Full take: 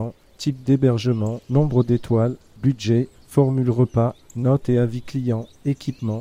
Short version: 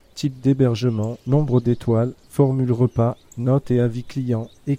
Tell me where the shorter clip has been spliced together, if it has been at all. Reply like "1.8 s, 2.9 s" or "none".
2.2 s